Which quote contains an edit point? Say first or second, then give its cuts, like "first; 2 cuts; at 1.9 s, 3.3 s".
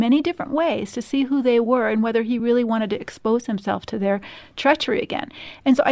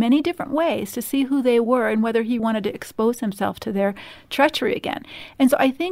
second; 1 cut; at 2.4 s